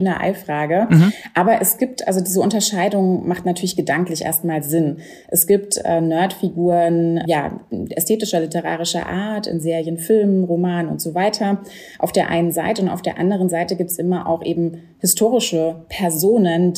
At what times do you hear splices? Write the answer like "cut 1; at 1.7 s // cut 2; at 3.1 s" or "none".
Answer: cut 1; at 7.3 s